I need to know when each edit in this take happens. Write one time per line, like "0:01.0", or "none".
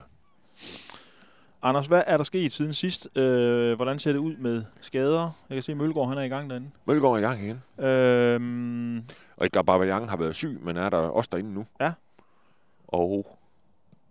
none